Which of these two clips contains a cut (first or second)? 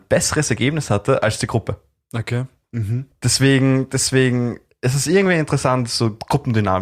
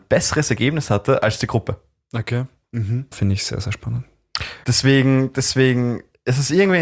second